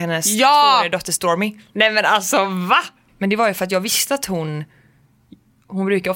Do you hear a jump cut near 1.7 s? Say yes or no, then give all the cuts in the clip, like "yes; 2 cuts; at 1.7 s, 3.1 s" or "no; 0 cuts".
yes; 2 cuts; at 1.7 s, 3.1 s